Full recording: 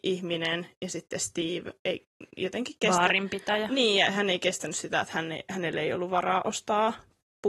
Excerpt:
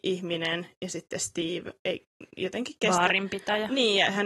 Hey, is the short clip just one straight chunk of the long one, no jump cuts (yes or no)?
yes